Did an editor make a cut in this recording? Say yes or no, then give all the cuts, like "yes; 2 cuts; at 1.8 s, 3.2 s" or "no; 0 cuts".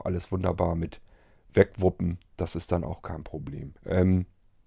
yes; 1 cut; at 3.8 s